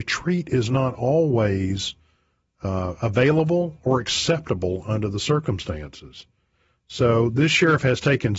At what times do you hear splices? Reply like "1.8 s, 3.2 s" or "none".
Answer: none